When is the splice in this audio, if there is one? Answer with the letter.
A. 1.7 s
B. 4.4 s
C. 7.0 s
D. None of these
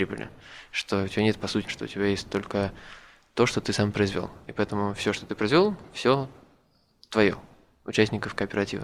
A